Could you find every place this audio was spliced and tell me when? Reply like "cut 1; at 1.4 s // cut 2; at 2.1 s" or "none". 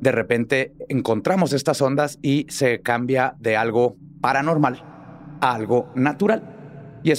none